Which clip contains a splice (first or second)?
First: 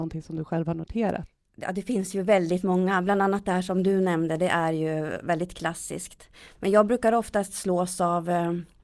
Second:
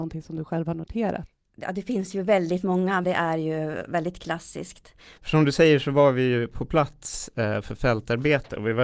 second